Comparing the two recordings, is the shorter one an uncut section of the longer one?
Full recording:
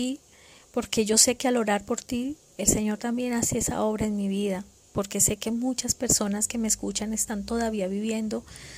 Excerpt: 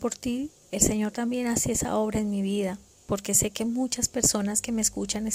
yes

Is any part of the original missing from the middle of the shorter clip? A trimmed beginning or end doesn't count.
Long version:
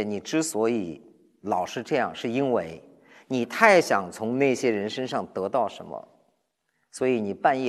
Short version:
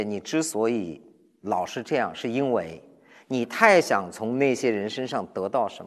no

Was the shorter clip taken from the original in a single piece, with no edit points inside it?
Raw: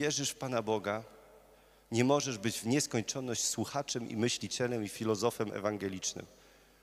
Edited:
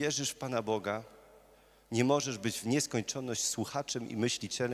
yes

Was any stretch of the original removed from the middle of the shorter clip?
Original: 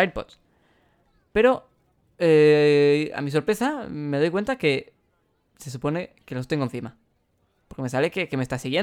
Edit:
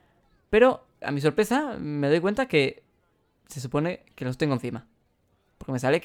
yes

